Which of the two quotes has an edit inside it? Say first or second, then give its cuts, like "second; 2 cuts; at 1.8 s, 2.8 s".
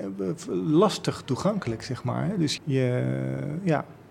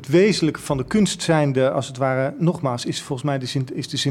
first; 1 cut; at 2.6 s